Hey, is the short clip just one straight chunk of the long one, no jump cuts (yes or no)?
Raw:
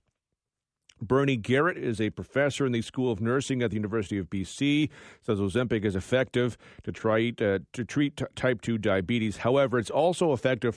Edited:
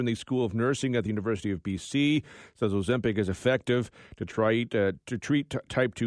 yes